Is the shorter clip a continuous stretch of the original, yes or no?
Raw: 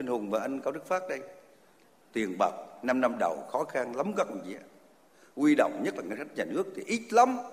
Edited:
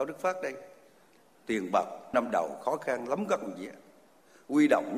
no